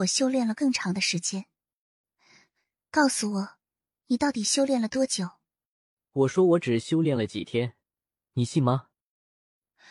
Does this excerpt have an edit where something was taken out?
no; 0 cuts

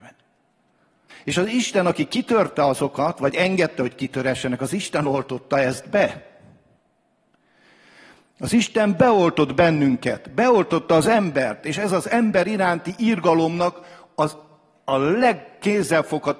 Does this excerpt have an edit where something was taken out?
yes; 1 cut; at 1.1 s

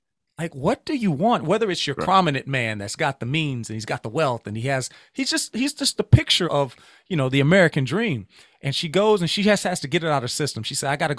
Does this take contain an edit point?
yes; 2 cuts; at 2.0 s, 6.4 s

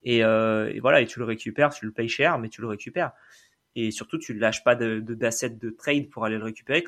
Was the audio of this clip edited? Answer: no; 0 cuts

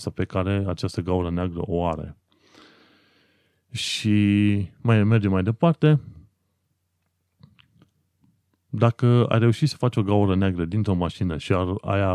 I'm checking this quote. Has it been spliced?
no; 0 cuts

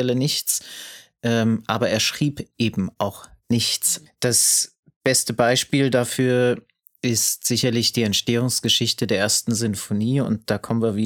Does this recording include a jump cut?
yes; 1 cut; at 4.1 s

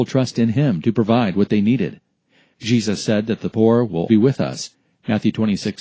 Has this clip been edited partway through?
yes; 1 cut; at 4.1 s

